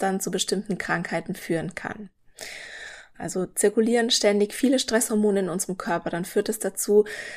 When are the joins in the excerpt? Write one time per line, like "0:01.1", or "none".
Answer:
0:03.1

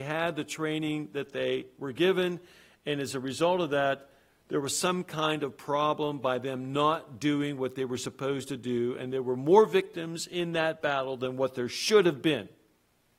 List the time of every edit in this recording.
none

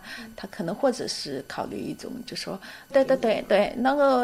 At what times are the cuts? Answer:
0:02.9

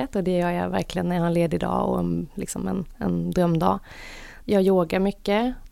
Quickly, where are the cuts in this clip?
0:04.4

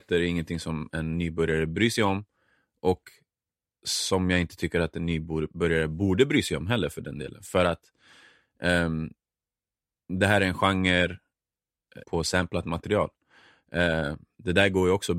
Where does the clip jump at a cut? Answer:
0:00.9
0:12.0

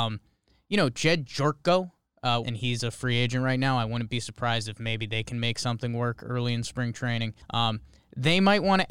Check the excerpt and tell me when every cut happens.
0:02.4
0:07.4

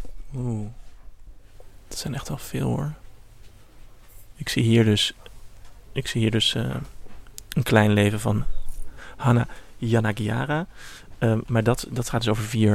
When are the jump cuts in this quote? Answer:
none

